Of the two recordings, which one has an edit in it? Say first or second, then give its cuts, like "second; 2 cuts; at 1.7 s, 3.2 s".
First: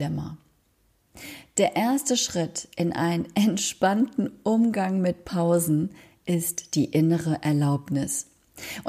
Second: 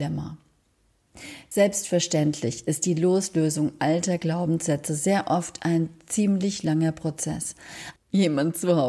second; 2 cuts; at 1.5 s, 8.0 s